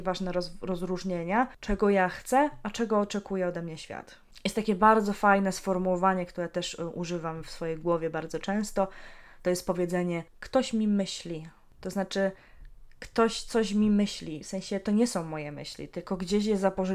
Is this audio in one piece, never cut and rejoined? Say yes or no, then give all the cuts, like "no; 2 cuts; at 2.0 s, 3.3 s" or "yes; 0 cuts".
yes; 0 cuts